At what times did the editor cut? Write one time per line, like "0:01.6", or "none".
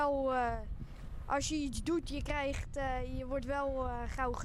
none